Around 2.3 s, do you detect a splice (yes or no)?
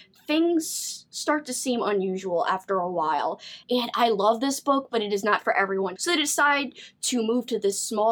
no